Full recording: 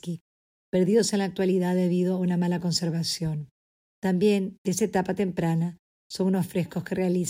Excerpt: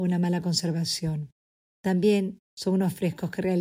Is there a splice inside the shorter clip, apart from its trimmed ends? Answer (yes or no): yes